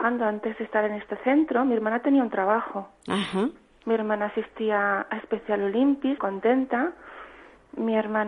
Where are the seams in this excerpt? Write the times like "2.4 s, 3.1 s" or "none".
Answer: 3.8 s, 6.2 s